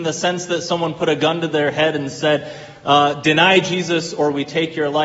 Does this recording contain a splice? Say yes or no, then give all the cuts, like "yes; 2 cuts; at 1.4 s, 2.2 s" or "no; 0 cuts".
no; 0 cuts